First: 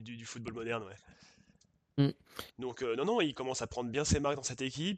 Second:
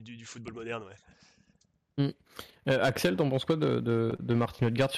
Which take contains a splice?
first; 1 cut; at 2.5 s

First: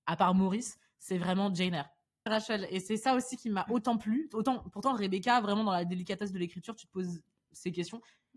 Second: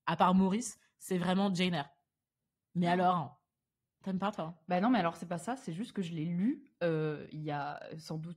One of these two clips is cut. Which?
first; 1 cut; at 2.3 s

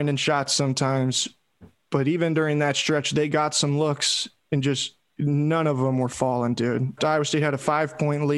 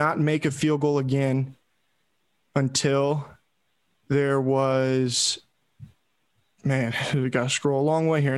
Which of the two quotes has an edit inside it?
first; 1 cut; at 7.0 s

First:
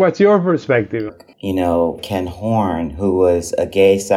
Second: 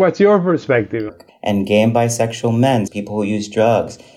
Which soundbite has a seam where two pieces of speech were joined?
second; 2 cuts; at 1.3 s, 2.9 s

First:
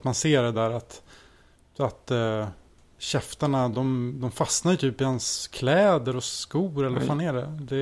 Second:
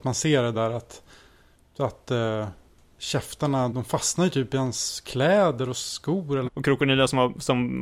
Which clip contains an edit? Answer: second; 2 cuts; at 3.7 s, 6.5 s

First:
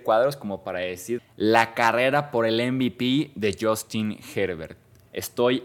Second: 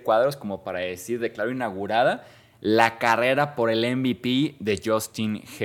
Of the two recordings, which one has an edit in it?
first; 1 cut; at 1.2 s

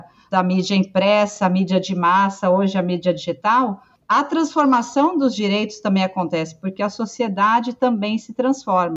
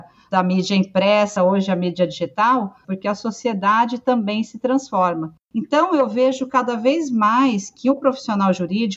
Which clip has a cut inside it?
second; 2 cuts; at 1.4 s, 2.8 s

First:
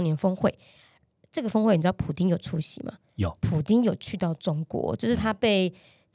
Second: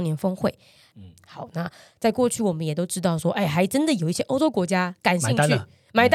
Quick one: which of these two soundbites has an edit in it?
second; 1 cut; at 0.9 s

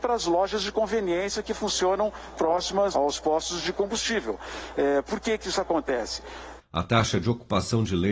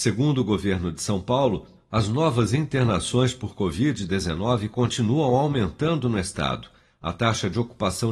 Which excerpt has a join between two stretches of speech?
first; 2 cuts; at 2.9 s, 6.6 s

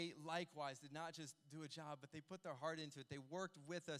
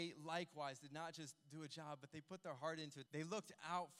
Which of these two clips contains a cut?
second; 1 cut; at 3.1 s

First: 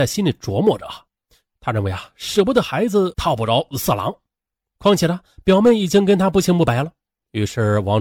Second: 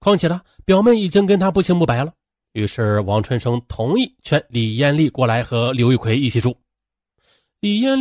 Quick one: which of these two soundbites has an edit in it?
first; 1 cut; at 3.1 s

